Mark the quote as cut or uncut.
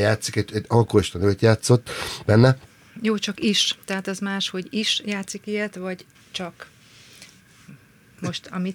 uncut